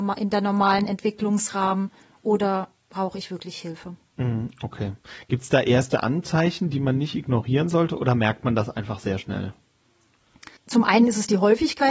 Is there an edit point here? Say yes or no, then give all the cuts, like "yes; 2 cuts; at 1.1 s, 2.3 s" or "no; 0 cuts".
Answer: yes; 1 cut; at 10.6 s